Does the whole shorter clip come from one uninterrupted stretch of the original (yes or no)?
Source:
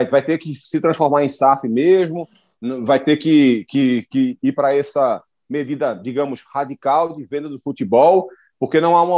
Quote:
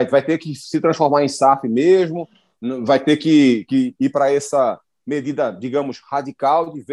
no